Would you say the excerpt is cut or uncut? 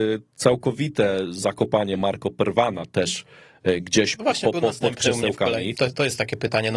cut